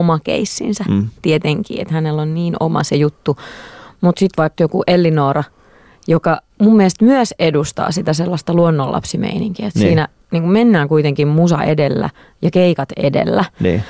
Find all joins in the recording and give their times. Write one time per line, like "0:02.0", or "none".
0:04.6
0:06.5